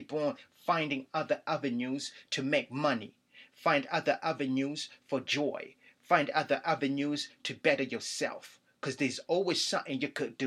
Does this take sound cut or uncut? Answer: uncut